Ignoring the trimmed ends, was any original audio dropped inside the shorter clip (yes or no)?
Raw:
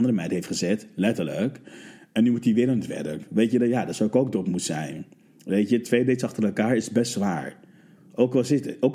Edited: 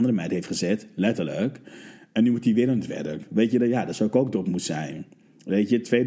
no